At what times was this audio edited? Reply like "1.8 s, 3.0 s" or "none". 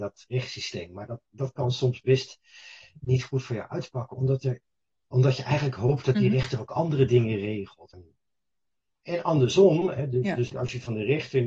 7.9 s, 10.5 s